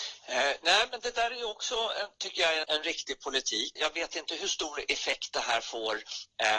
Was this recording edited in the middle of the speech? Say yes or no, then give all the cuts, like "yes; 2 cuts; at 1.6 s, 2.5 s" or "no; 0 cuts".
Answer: yes; 2 cuts; at 2.6 s, 3.8 s